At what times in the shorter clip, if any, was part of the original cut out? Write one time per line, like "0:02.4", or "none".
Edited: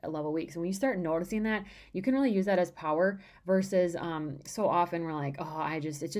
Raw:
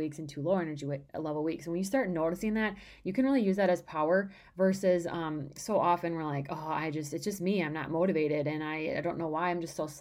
none